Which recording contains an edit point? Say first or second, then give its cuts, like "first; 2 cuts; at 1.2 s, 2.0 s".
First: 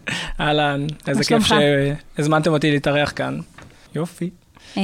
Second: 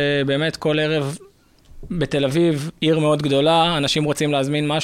first; 1 cut; at 3.9 s